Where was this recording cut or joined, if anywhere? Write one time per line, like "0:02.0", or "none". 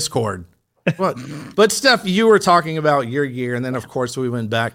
0:01.0